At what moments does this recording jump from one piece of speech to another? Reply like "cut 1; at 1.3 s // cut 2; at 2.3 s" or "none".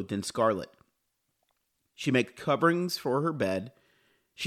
none